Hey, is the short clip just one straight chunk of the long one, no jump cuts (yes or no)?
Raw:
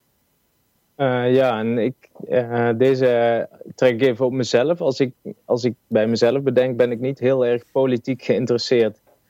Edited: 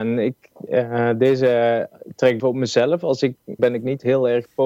no